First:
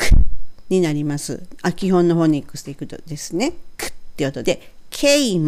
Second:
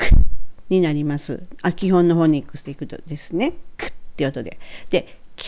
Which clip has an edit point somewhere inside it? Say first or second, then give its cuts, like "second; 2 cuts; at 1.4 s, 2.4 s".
first; 1 cut; at 4.4 s